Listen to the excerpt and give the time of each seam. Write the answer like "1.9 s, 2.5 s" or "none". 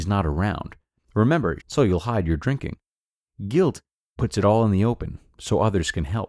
1.6 s